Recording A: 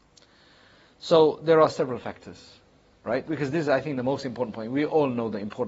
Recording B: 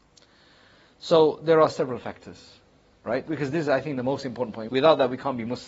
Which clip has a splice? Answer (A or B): B